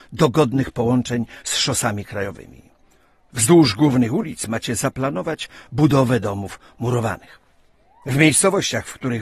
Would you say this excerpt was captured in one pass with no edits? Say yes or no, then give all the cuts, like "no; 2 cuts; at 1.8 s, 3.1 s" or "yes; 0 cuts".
yes; 0 cuts